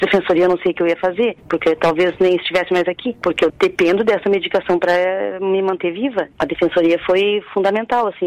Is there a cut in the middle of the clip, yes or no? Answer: no